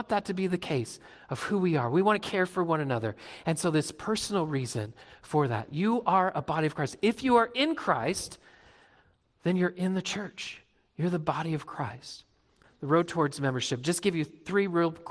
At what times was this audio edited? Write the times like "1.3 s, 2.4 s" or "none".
12.6 s